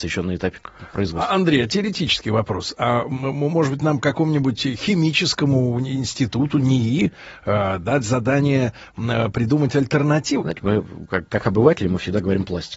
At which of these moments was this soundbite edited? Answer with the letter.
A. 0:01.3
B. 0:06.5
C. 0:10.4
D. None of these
C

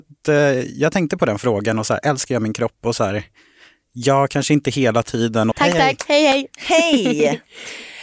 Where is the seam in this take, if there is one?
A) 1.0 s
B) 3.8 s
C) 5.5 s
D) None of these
C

